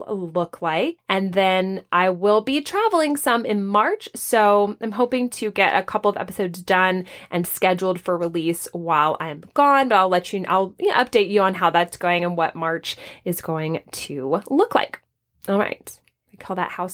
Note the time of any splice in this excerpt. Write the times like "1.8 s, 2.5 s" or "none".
none